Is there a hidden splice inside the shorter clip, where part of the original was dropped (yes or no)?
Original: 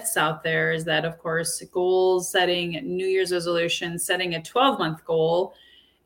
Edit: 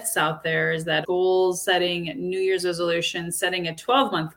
yes